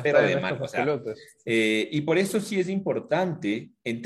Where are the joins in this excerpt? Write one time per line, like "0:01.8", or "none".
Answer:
none